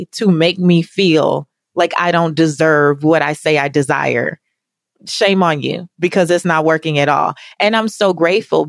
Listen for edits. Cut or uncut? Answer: uncut